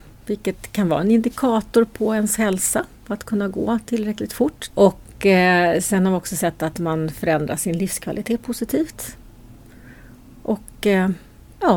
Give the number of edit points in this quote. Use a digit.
1